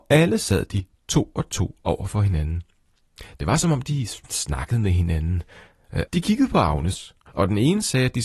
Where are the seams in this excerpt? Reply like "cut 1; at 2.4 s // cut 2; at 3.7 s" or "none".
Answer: cut 1; at 6.1 s